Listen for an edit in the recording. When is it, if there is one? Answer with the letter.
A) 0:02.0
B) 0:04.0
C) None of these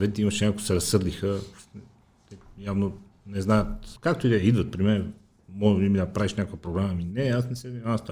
B